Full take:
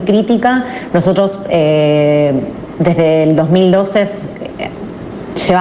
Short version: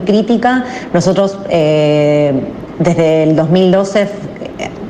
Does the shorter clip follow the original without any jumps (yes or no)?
yes